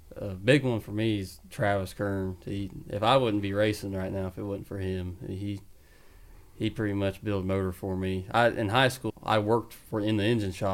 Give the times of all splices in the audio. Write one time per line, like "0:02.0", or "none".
0:09.1